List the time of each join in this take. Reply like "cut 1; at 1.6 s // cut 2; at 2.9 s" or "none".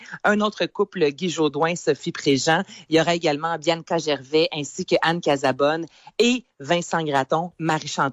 none